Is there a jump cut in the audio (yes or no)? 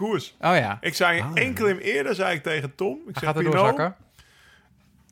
no